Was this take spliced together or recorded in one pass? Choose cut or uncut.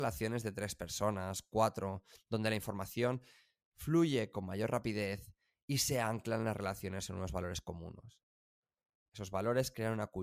uncut